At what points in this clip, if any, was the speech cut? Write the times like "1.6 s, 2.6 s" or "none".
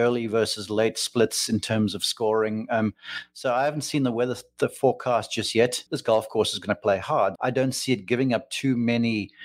5.9 s, 7.4 s